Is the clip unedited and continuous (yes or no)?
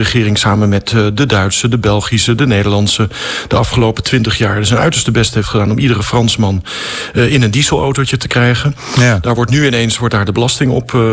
yes